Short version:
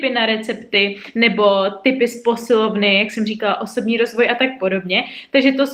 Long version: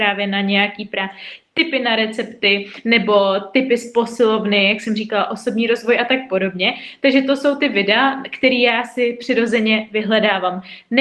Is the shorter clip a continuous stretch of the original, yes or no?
yes